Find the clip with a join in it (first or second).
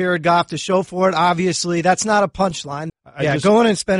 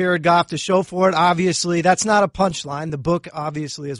first